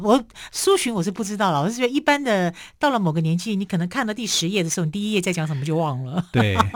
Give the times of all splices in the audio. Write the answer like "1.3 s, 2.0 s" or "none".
none